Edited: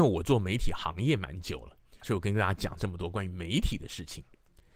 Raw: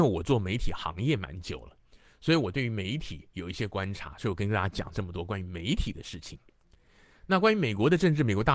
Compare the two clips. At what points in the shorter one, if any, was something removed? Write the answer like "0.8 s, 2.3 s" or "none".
2.0 s